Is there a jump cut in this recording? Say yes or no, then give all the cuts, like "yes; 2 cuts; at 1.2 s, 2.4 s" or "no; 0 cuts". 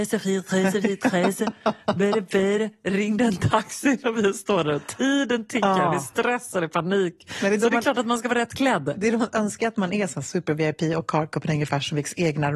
no; 0 cuts